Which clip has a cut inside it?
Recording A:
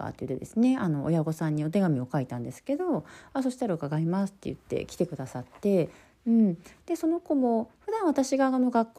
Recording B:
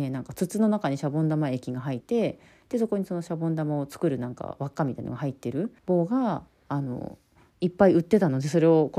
B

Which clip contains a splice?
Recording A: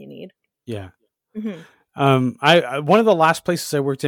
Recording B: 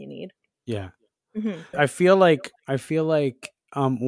B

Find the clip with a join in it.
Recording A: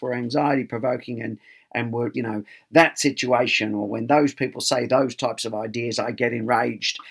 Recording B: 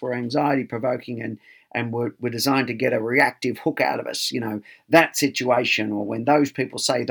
A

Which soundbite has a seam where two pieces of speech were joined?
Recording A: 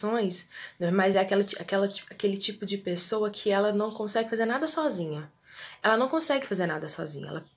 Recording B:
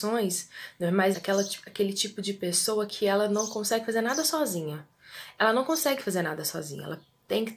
B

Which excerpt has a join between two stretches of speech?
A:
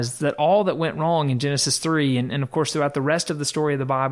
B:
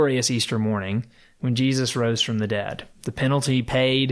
B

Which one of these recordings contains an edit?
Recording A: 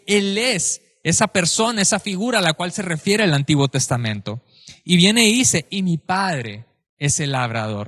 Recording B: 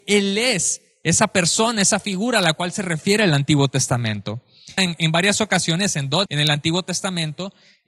B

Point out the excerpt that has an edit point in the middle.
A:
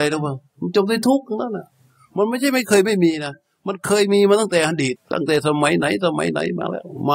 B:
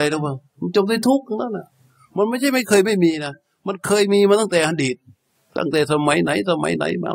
A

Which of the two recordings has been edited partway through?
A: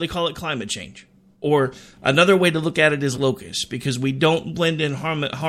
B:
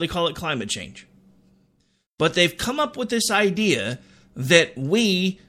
A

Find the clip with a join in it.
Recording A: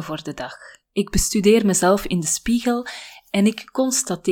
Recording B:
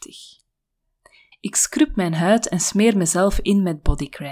B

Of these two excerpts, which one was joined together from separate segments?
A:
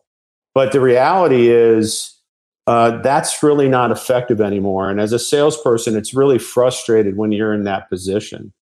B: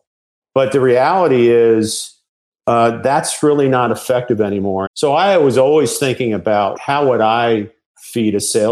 B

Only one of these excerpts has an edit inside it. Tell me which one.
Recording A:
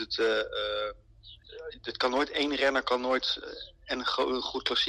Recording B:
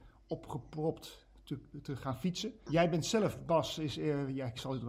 B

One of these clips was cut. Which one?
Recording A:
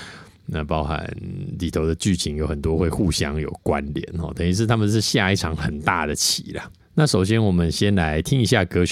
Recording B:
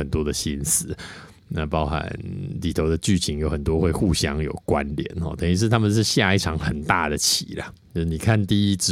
A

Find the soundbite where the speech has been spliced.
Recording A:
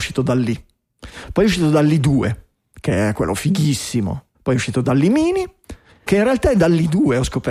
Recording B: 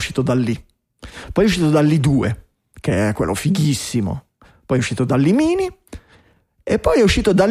A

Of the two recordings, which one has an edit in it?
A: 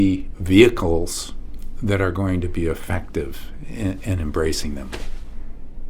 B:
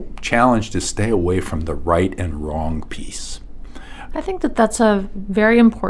B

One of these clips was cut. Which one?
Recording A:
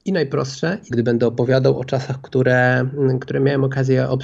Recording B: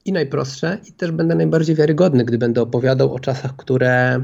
A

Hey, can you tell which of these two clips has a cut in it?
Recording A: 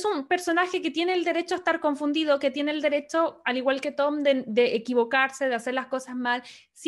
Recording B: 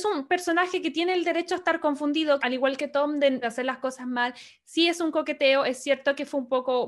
B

